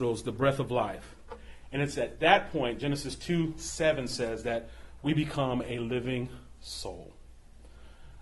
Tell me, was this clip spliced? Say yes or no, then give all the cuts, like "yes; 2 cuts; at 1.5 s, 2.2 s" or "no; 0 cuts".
no; 0 cuts